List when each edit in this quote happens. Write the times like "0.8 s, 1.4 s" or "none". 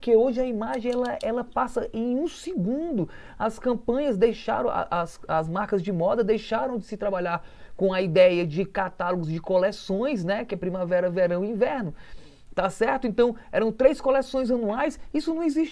none